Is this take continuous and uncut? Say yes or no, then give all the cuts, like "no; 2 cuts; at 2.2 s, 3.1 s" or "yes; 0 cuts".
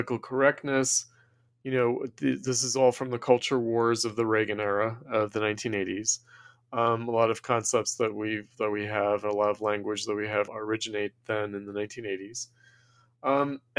no; 1 cut; at 10.5 s